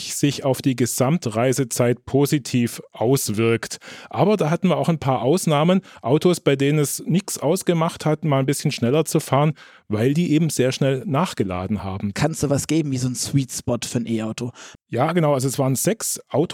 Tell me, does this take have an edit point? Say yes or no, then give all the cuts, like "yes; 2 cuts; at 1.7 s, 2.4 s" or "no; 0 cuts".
yes; 2 cuts; at 12.1 s, 14.7 s